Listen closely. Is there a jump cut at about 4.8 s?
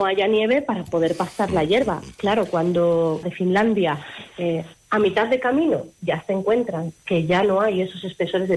no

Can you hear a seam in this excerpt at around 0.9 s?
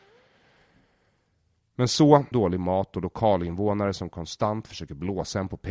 no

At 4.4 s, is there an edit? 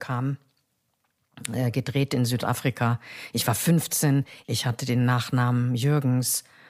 yes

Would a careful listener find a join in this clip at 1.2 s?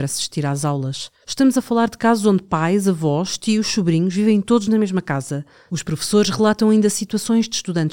yes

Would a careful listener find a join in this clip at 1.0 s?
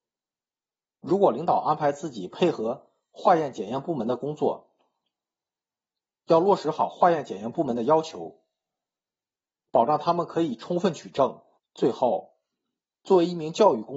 no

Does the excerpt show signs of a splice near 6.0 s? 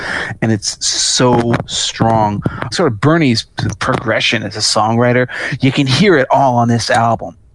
no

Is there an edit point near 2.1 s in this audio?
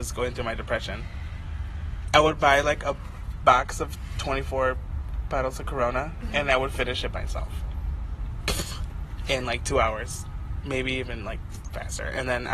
yes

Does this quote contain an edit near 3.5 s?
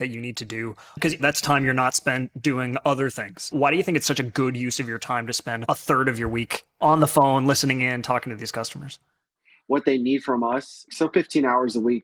no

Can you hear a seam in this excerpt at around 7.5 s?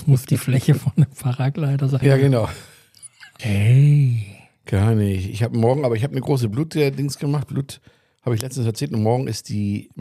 no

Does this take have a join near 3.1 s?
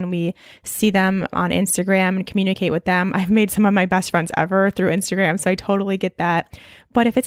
no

